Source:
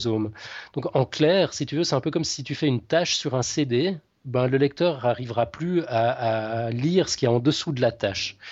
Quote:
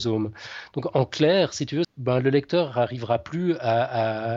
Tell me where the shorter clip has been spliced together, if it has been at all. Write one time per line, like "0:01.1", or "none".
0:01.8